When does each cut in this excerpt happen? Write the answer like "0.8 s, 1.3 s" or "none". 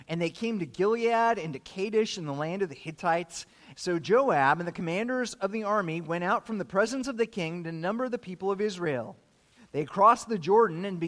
3.7 s